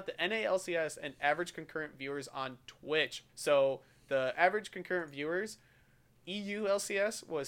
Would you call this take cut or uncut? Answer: cut